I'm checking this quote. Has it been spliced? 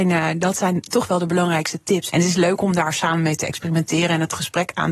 yes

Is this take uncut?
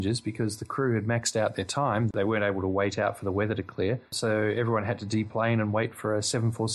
yes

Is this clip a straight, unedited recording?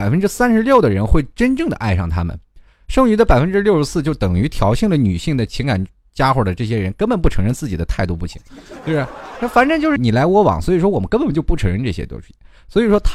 no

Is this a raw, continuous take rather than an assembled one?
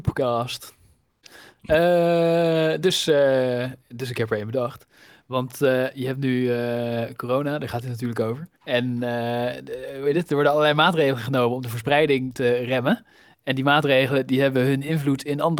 no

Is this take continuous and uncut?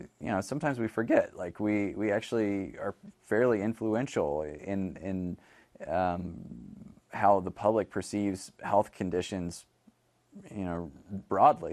yes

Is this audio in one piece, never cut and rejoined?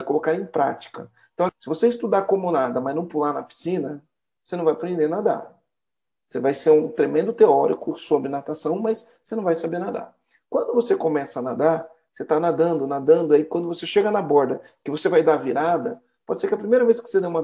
no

